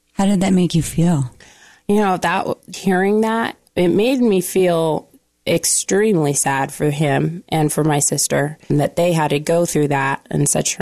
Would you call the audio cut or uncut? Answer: cut